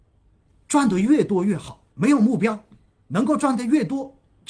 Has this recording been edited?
yes; 1 cut; at 1.9 s

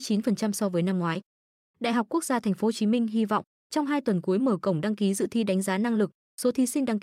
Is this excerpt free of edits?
yes; 0 cuts

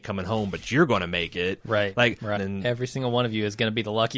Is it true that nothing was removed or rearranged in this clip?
no; 1 cut; at 2.4 s

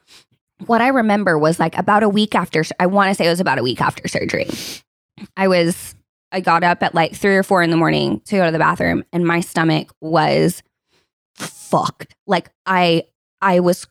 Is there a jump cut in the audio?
no; 0 cuts

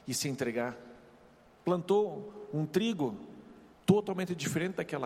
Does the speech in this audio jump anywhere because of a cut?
yes; 2 cuts; at 1.6 s, 3.7 s

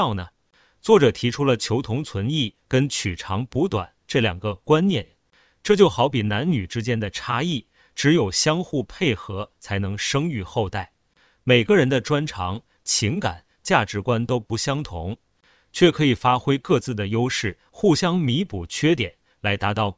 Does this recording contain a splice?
no; 0 cuts

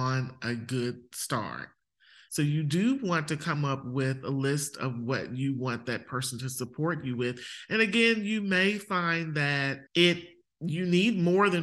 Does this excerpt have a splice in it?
yes; 2 cuts; at 2.3 s, 9.9 s

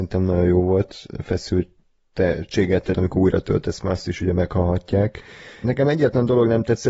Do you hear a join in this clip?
yes; 2 cuts; at 2.9 s, 5.6 s

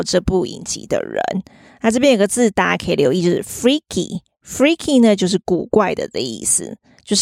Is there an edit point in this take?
no; 0 cuts

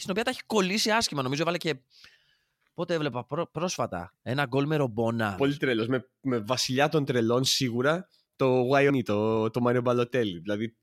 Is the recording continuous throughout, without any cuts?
no; 2 cuts; at 5.4 s, 8.9 s

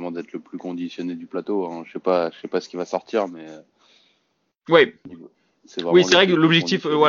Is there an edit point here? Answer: no; 0 cuts

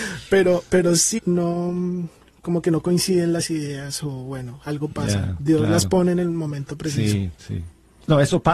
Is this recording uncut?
no; 1 cut; at 1.2 s

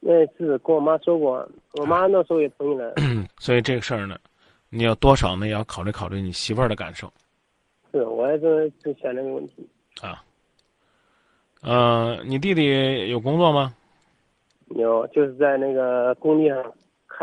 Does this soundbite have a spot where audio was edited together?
yes; 1 cut; at 3.3 s

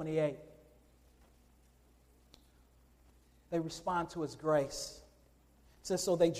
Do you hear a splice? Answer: no; 0 cuts

